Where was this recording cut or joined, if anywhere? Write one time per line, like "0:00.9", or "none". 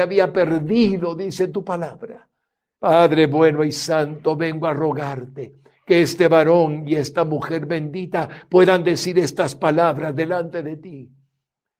0:02.8